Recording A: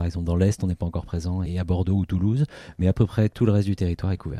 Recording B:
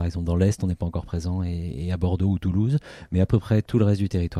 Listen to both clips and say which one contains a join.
A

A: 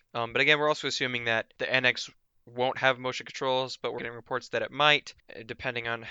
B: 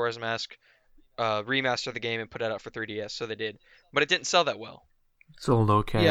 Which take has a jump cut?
A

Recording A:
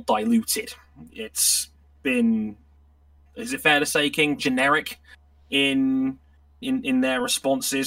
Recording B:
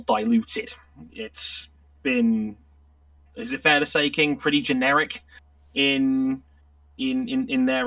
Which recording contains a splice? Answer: A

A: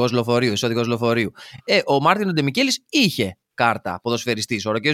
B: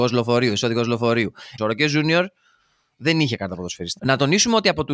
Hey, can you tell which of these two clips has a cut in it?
B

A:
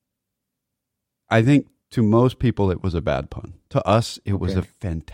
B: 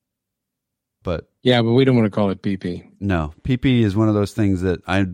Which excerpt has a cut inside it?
B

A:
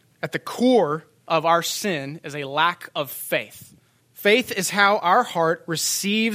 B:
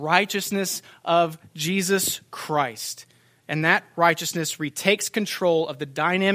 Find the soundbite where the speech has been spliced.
A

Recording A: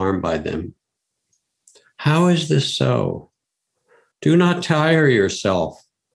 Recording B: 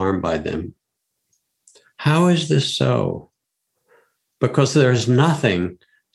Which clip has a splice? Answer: A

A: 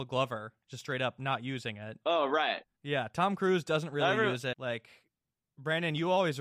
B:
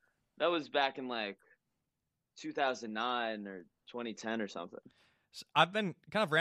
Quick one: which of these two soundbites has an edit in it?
A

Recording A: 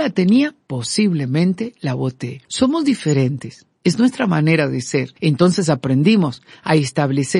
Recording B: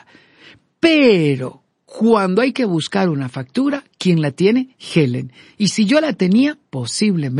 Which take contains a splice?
A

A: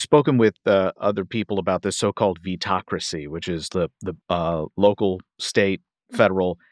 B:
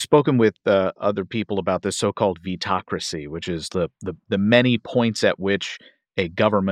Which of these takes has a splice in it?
A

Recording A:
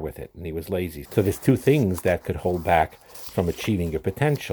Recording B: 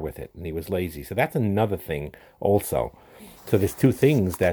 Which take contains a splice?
A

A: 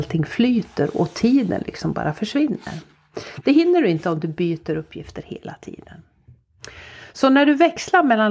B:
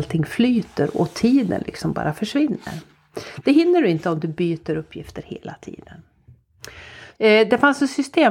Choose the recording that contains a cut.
B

